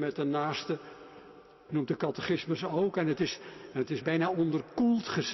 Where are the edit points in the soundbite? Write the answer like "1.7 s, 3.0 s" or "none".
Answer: 4.0 s